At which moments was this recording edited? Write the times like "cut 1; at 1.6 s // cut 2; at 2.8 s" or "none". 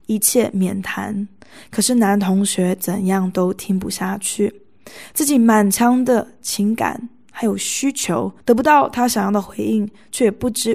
cut 1; at 8.4 s